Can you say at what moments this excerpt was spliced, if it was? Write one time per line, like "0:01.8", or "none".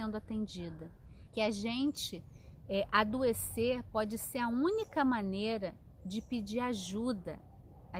0:01.3